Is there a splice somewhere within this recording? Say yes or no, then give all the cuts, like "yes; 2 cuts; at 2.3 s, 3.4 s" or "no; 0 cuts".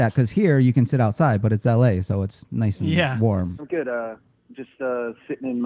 yes; 1 cut; at 3.6 s